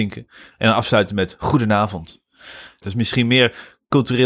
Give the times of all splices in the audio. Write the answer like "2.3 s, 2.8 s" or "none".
2.8 s